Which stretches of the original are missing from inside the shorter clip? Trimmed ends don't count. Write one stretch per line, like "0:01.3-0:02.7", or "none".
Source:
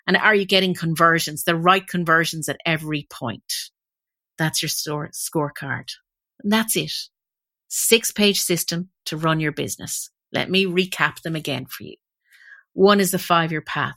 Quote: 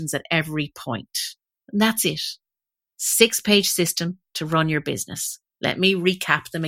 0:03.9-0:06.3